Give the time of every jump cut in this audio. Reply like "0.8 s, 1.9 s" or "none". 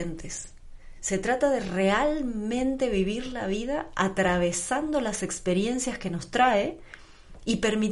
none